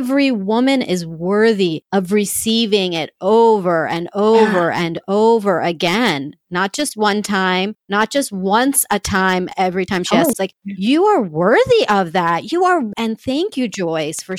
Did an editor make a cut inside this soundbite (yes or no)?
yes